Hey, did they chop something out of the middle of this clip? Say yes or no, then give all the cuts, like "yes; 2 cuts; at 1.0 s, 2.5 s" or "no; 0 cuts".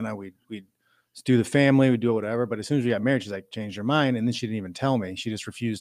no; 0 cuts